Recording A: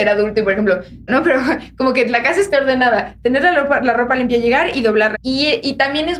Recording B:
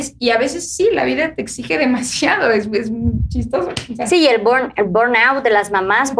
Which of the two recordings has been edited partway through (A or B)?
A